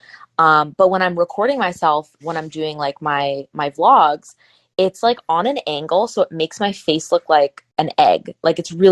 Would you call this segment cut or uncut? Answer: cut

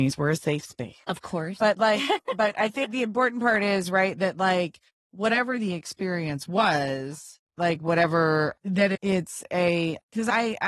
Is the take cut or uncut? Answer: uncut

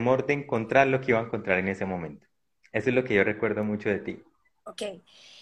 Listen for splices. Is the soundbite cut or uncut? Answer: uncut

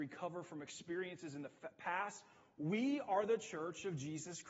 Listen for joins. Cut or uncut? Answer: uncut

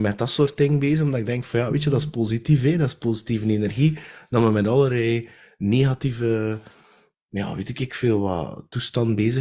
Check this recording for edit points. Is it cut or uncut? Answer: uncut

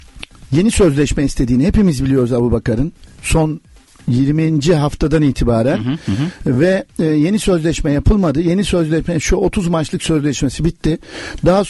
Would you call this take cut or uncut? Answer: uncut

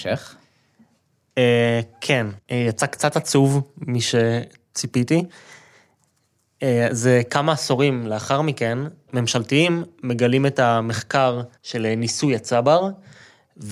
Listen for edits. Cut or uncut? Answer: cut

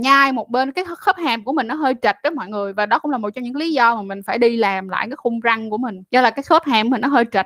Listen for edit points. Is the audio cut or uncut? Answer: cut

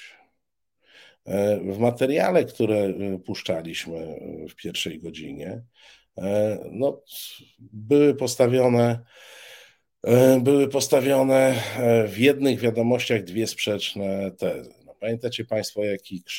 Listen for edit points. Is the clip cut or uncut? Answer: uncut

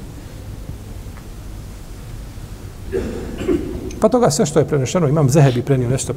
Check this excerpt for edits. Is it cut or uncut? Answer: cut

